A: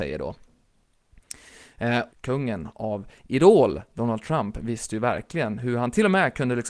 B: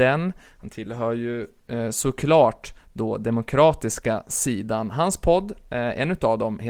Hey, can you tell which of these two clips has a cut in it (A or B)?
A